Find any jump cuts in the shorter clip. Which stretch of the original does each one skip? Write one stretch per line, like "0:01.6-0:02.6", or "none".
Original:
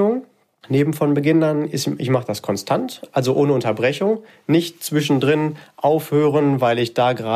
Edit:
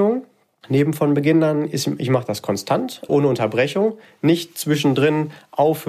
0:03.1-0:03.3